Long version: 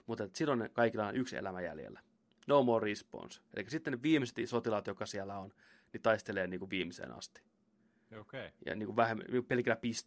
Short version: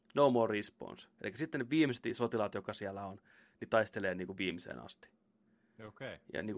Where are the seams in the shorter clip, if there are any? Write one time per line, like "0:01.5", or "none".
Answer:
none